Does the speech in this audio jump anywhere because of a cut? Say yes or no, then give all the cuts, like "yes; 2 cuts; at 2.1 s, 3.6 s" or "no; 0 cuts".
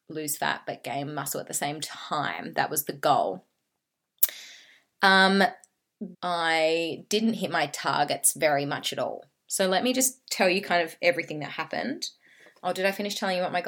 yes; 1 cut; at 6.1 s